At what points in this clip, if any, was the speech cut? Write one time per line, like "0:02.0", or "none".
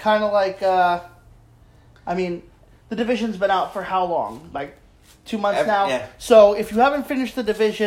none

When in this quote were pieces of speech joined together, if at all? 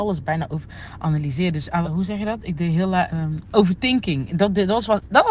0:01.8
0:03.1

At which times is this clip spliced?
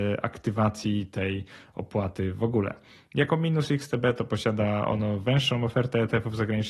none

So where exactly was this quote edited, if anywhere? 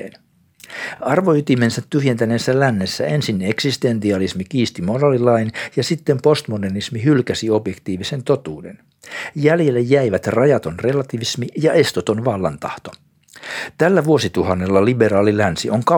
none

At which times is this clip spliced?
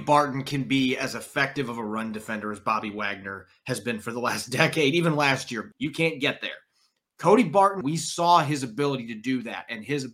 0:05.7
0:07.8

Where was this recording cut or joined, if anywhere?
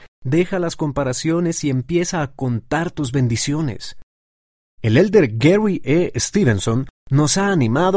0:06.9

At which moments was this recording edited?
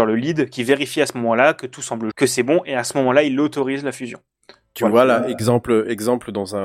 0:02.1

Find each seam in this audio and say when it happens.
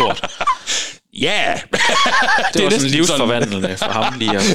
none

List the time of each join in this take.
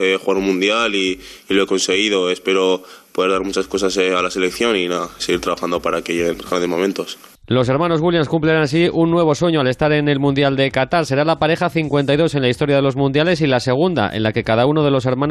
0:05.2

